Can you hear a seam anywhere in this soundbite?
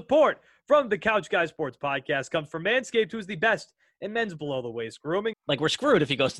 yes; 1 cut; at 5.3 s

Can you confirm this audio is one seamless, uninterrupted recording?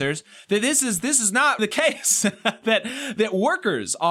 no; 1 cut; at 1.6 s

